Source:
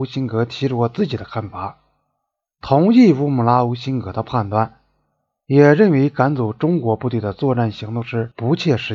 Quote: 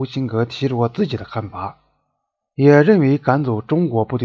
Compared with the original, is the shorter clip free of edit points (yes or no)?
no